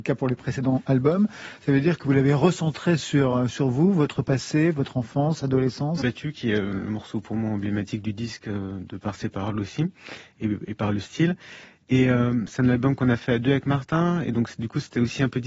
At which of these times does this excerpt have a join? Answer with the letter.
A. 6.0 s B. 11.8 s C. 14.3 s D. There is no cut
A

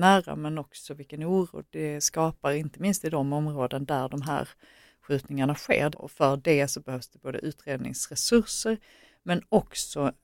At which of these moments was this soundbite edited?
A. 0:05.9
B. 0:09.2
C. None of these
A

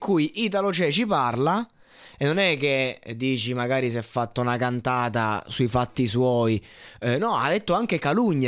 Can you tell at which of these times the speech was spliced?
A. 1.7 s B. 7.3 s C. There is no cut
C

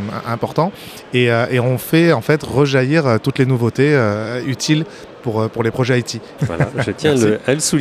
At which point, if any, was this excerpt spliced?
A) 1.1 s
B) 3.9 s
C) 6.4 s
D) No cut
C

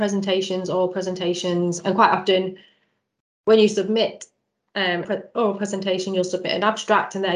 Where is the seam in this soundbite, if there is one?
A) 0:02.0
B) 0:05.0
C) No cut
B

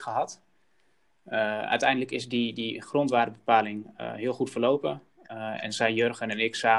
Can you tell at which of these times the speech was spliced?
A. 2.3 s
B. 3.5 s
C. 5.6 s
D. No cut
D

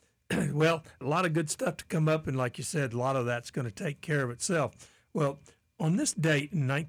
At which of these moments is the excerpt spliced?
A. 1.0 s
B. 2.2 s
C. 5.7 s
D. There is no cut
A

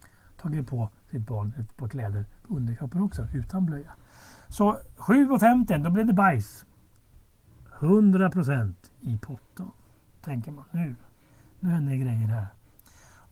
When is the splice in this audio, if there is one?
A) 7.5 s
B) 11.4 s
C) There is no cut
C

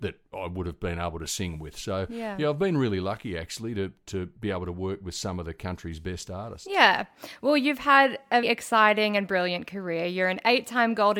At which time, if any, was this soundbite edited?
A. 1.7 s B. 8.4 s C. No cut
B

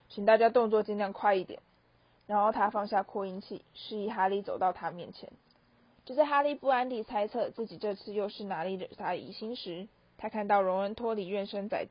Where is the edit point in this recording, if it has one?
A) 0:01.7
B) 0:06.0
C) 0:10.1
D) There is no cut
B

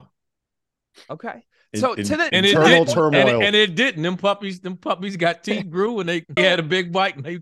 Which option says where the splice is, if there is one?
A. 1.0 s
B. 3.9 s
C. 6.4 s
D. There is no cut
C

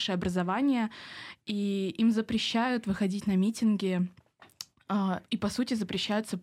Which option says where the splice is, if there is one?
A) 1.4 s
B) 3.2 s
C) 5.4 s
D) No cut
D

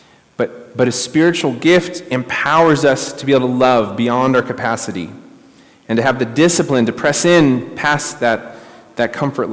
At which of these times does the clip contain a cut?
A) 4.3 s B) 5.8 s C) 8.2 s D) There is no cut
D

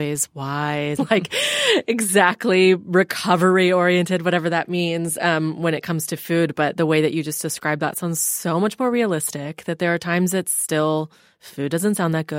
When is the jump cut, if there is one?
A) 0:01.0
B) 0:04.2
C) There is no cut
A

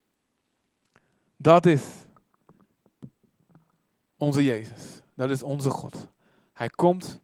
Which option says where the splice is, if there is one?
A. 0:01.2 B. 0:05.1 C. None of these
C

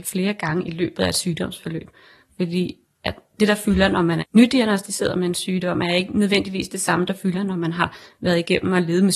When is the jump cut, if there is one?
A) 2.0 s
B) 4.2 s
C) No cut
B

